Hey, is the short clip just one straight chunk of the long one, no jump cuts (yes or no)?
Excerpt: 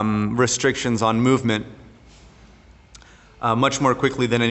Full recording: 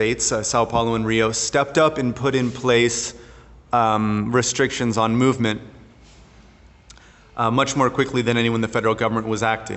yes